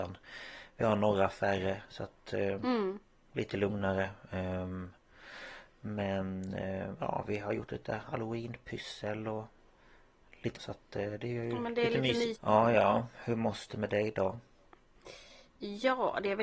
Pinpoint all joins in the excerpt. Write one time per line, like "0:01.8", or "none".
0:10.6
0:12.3